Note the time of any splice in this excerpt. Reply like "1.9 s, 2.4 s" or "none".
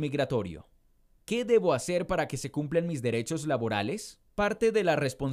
4.3 s